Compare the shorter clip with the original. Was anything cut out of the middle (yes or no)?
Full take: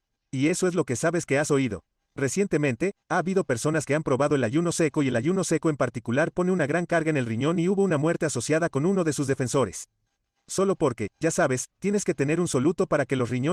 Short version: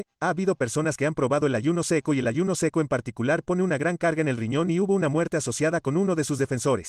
no